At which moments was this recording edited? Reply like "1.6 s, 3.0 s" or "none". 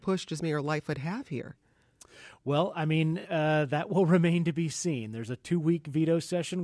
none